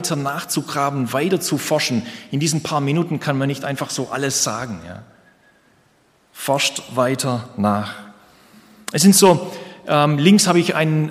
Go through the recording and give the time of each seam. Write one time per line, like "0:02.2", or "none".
none